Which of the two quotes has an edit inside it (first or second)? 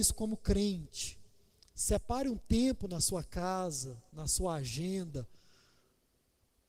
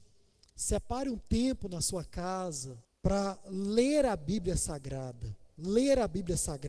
second